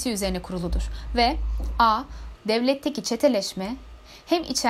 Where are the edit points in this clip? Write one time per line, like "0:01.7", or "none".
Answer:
0:02.3